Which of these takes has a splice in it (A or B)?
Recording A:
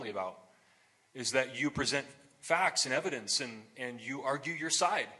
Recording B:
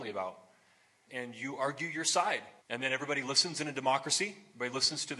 B